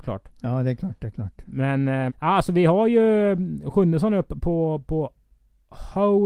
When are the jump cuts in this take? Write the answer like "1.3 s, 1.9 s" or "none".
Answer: 2.1 s